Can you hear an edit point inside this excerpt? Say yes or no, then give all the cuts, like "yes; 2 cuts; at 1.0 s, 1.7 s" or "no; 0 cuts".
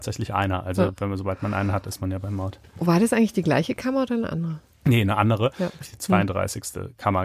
yes; 1 cut; at 5.8 s